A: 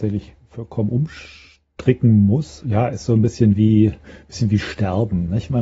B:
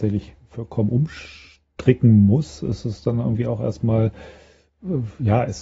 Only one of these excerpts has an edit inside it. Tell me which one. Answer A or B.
A